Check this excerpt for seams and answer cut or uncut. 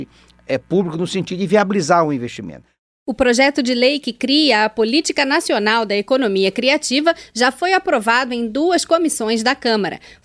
uncut